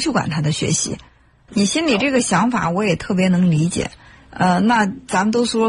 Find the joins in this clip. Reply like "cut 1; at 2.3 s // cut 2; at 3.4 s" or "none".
cut 1; at 1.5 s